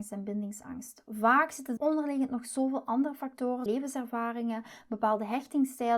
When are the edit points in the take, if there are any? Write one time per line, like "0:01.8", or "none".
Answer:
0:01.8
0:03.7